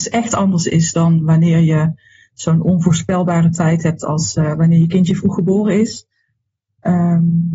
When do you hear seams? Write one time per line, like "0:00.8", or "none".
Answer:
none